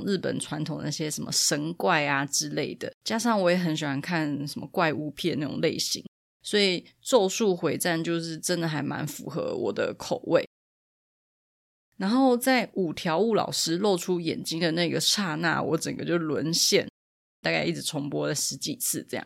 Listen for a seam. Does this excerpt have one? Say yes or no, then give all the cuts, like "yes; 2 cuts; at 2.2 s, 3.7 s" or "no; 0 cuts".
yes; 2 cuts; at 3.0 s, 17.4 s